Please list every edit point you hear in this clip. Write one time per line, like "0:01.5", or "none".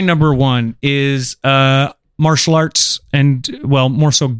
none